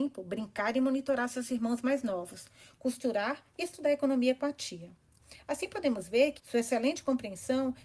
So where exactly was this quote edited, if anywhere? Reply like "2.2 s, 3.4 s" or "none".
6.4 s